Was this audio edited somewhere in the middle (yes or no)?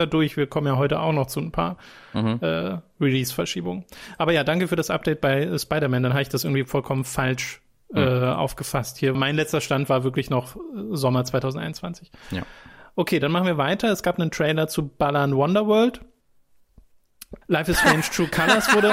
yes